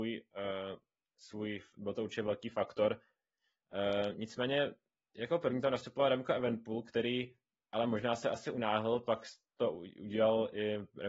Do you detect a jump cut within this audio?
no; 0 cuts

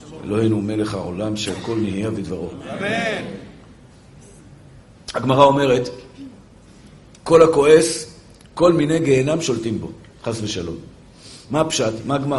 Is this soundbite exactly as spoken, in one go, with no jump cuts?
yes; 0 cuts

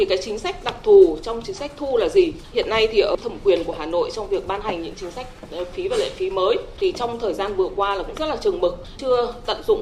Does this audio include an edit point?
yes; 1 cut; at 2.5 s

